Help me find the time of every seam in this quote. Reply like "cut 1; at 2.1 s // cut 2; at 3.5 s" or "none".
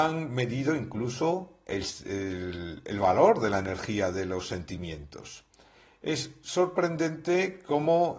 none